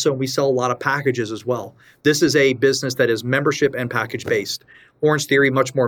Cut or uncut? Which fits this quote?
uncut